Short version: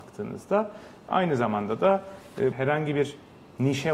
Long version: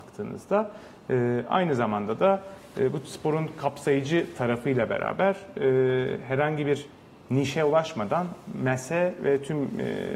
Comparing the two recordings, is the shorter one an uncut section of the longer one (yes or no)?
no